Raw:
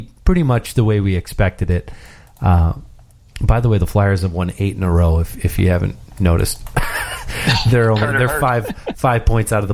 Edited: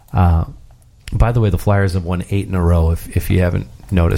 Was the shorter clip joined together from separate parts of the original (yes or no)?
no